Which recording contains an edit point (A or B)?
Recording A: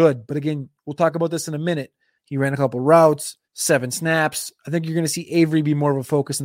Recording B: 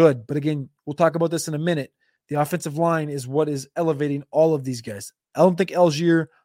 A